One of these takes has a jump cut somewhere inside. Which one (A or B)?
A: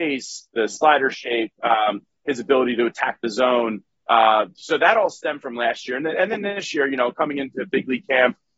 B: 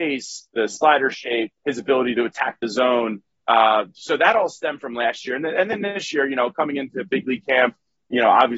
B